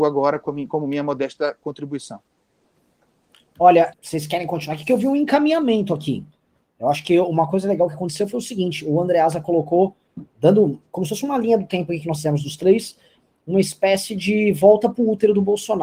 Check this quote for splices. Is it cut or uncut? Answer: cut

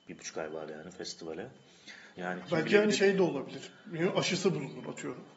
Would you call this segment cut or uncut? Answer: cut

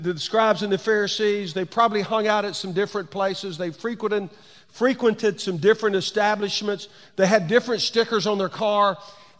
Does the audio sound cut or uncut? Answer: uncut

